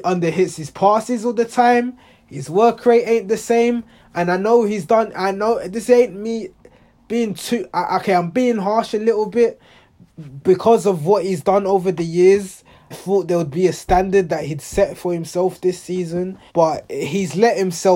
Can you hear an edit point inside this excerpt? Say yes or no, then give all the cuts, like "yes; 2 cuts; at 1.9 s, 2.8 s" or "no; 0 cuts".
yes; 2 cuts; at 12.9 s, 16.5 s